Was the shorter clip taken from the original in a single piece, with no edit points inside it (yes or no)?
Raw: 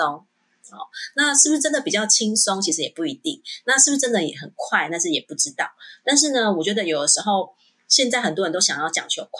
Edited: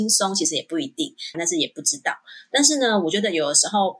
no